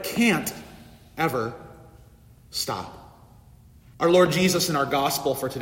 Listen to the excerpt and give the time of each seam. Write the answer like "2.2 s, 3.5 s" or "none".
3.9 s